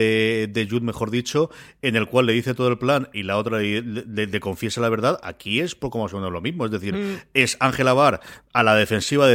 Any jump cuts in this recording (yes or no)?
no